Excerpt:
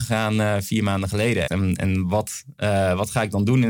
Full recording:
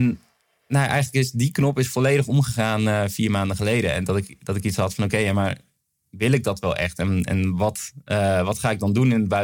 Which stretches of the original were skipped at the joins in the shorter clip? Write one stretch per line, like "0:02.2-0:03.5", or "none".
0:03.9-0:06.9